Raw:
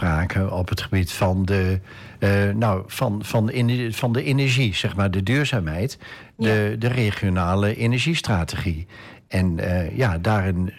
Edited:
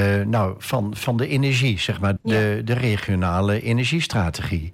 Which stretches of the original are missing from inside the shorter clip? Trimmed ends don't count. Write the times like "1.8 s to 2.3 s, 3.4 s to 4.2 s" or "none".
3.3 s to 3.9 s, 5.1 s to 6.3 s